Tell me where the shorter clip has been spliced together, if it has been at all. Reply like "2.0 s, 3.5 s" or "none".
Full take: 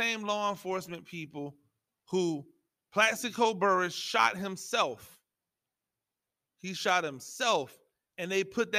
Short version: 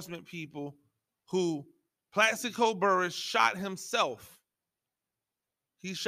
none